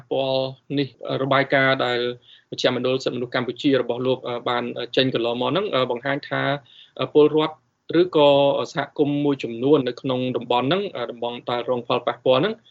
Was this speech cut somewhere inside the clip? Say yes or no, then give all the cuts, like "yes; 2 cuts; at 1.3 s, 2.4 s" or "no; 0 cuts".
yes; 1 cut; at 9.8 s